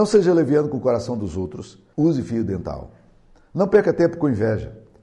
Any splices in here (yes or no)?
yes